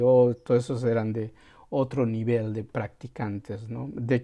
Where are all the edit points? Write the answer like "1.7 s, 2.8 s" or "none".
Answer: none